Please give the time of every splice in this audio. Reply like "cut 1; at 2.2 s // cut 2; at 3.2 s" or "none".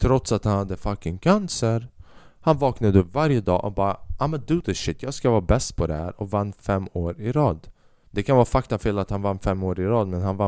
none